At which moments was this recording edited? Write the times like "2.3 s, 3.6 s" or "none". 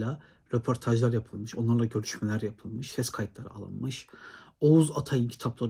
none